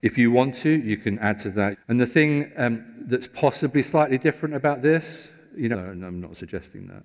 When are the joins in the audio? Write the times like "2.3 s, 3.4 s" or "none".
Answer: 1.7 s, 5.7 s